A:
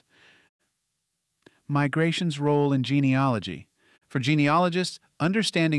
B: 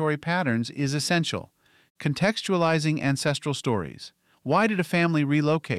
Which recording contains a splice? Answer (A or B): B